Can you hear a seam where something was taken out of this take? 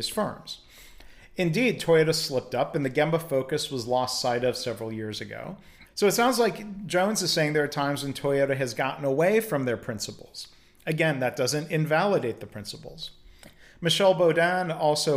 yes; 1 cut; at 5.8 s

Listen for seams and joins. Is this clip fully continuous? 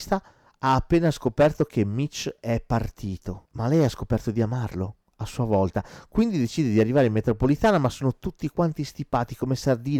yes; 0 cuts

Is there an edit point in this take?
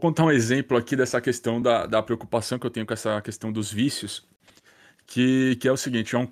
no; 0 cuts

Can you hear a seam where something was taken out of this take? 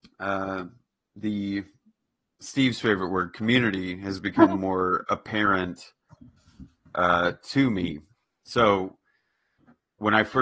no; 0 cuts

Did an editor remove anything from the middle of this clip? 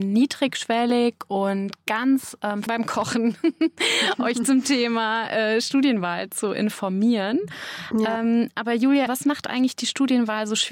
yes; 2 cuts; at 2.7 s, 9.1 s

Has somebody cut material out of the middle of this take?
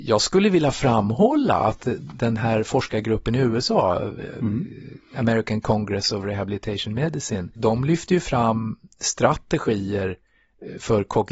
yes; 1 cut; at 7.5 s

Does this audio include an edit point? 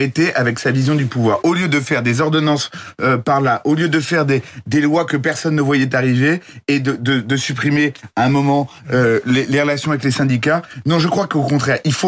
no; 0 cuts

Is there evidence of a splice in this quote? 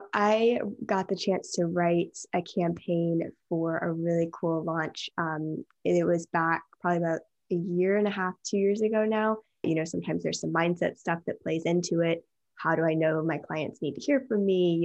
yes; 1 cut; at 9.6 s

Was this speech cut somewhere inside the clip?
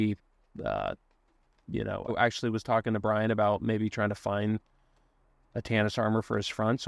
yes; 1 cut; at 2.1 s

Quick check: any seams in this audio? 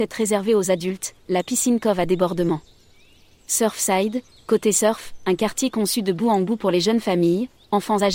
no; 0 cuts

